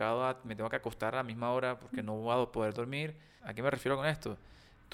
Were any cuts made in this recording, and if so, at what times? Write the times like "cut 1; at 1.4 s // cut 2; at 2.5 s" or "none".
cut 1; at 3.4 s